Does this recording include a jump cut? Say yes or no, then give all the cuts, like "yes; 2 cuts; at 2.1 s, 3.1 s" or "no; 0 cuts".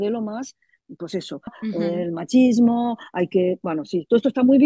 yes; 1 cut; at 1.5 s